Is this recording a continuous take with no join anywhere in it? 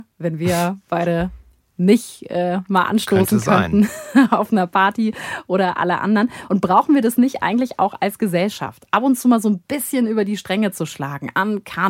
yes; 0 cuts

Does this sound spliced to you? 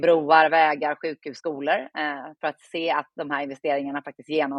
no; 0 cuts

